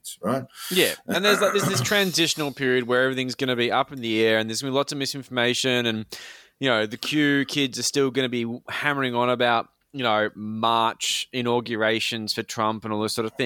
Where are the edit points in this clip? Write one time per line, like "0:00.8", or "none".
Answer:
none